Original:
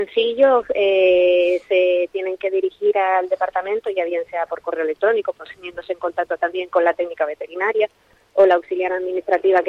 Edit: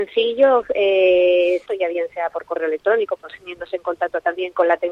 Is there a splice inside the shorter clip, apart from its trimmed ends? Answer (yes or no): yes